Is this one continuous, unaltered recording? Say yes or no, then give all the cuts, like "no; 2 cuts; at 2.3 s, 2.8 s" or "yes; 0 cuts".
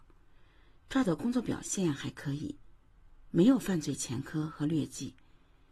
yes; 0 cuts